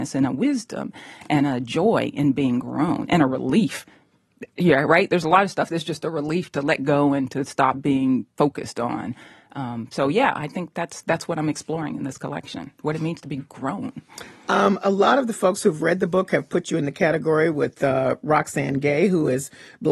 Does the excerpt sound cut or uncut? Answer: uncut